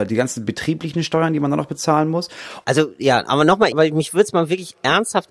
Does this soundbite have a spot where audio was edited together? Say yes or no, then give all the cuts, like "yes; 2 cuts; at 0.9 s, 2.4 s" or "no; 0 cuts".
yes; 2 cuts; at 2.6 s, 3.7 s